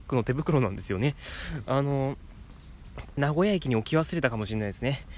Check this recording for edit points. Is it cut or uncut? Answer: cut